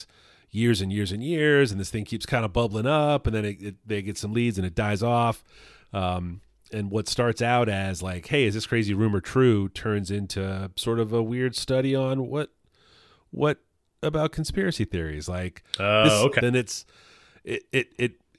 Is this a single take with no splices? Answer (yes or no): no